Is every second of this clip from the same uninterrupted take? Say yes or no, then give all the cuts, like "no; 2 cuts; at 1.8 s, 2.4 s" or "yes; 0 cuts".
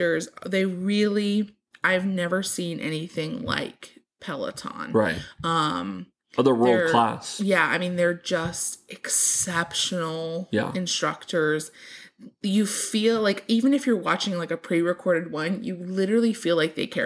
yes; 0 cuts